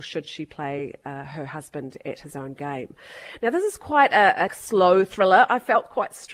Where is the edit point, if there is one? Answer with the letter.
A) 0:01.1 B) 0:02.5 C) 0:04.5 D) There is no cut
C